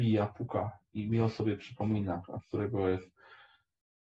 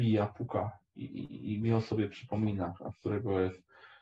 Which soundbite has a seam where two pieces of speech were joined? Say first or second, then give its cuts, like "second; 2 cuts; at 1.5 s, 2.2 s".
first; 1 cut; at 0.9 s